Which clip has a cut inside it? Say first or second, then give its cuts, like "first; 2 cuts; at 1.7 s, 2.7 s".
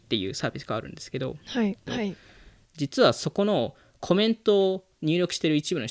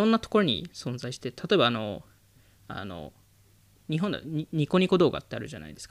first; 1 cut; at 1.9 s